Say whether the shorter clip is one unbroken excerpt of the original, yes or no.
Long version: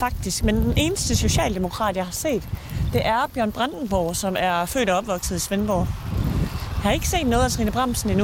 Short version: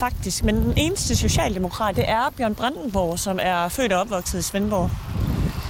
no